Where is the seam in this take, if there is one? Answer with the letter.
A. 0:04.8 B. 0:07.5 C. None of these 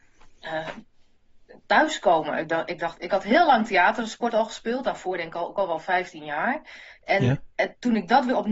C